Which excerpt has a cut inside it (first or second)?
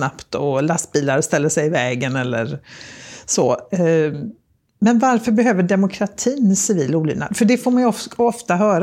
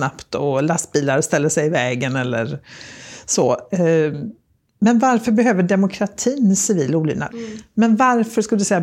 second